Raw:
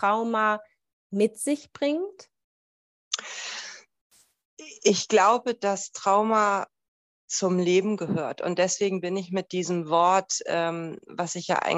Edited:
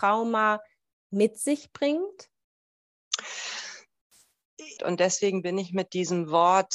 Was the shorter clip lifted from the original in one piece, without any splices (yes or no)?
no